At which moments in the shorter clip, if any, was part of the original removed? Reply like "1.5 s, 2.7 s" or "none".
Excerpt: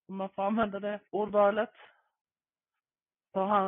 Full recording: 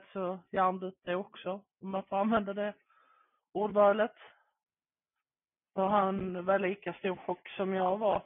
1.1 s